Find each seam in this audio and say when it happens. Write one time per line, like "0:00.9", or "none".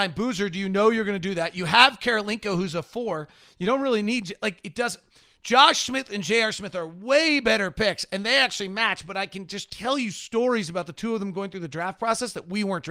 none